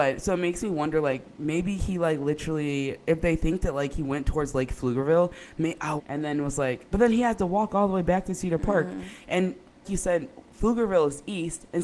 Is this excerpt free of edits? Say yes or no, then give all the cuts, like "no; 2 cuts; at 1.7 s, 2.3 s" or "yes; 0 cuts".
no; 2 cuts; at 6.0 s, 9.8 s